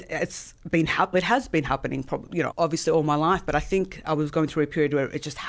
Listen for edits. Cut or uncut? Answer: cut